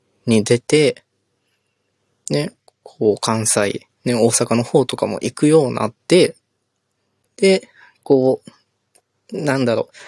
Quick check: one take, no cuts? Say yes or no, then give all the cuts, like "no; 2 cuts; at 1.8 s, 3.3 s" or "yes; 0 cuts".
no; 1 cut; at 3.9 s